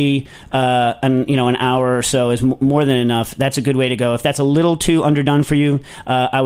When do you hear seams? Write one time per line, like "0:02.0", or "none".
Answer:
none